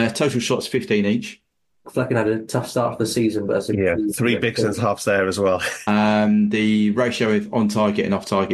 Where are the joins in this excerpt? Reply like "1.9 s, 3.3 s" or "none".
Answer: 1.8 s, 5.8 s

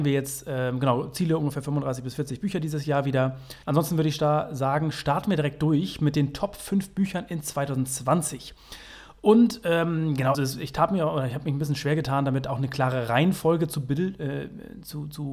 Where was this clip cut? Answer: 3.6 s, 10.3 s

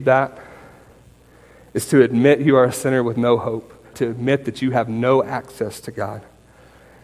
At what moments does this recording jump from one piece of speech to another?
3.9 s

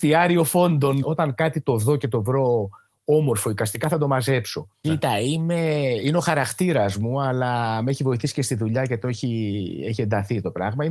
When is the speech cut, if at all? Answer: 1.0 s, 4.8 s

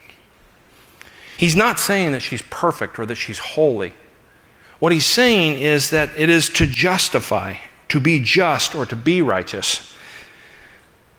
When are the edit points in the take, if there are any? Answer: 1.4 s

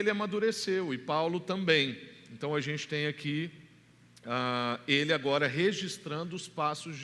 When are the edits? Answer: none

